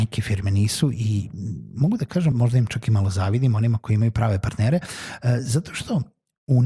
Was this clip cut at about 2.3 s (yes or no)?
yes